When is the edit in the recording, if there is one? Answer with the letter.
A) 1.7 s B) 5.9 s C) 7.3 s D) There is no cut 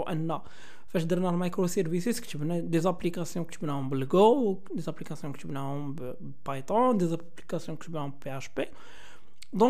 D